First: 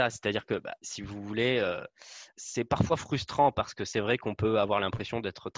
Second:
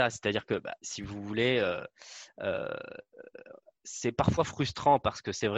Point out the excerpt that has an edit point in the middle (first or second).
first